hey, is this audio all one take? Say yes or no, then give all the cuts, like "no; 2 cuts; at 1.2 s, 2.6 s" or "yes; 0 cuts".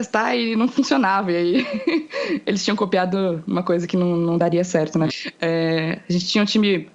no; 1 cut; at 5.1 s